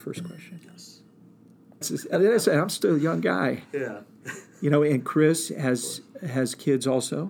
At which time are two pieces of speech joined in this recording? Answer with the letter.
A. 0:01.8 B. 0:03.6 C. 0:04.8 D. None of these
A